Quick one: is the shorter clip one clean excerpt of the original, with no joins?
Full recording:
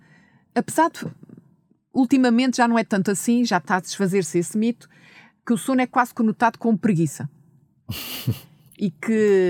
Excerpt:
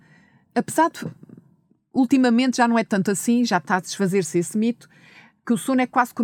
yes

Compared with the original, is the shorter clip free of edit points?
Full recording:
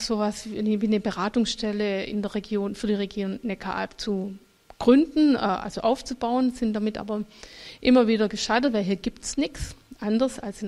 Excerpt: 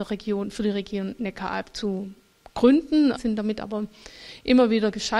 no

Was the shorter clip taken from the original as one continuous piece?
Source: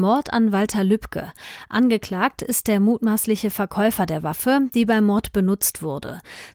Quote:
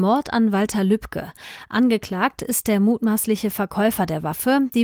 yes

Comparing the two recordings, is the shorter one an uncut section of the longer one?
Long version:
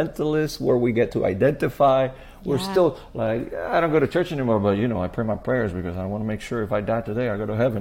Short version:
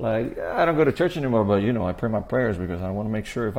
yes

